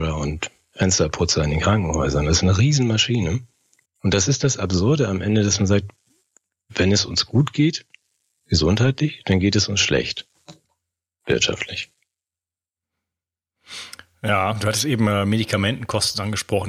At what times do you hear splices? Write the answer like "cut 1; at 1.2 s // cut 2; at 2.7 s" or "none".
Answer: cut 1; at 3.8 s